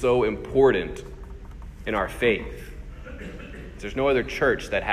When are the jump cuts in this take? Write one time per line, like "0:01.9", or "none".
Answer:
0:03.8